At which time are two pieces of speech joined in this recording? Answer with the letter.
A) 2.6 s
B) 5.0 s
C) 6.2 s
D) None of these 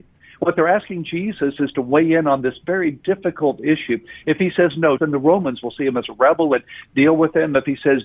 B